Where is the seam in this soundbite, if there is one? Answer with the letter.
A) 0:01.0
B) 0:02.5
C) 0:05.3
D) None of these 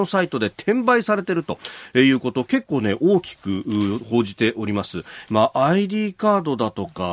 C